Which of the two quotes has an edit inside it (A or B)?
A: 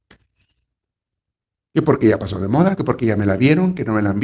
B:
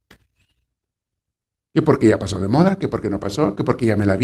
A